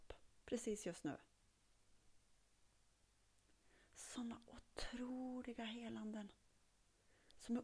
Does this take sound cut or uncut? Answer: uncut